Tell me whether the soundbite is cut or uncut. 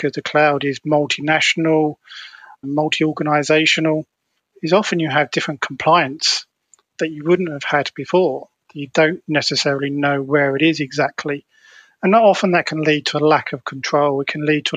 cut